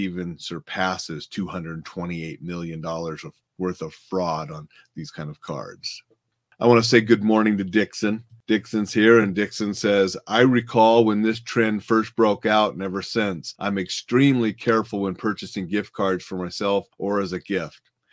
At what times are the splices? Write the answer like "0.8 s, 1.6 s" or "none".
none